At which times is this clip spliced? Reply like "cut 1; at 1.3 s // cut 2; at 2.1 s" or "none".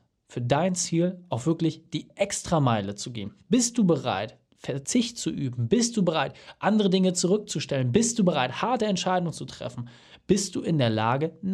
none